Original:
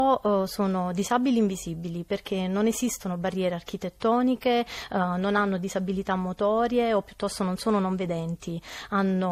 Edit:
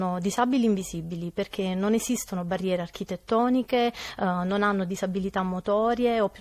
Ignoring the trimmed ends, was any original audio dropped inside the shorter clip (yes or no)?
no